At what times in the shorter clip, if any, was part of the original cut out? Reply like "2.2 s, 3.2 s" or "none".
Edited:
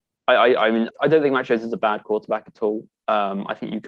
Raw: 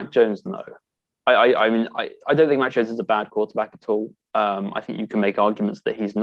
0.9 s